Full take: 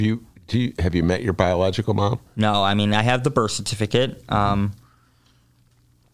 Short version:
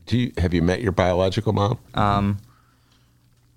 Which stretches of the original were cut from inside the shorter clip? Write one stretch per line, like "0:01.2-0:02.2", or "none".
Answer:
0:02.3-0:04.2